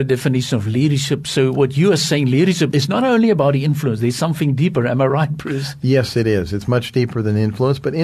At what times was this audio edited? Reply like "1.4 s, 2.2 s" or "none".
2.7 s